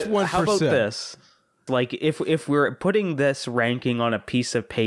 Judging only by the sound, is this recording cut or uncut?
cut